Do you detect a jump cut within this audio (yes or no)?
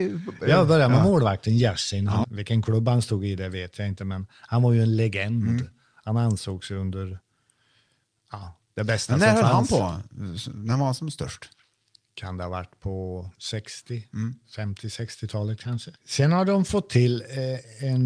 yes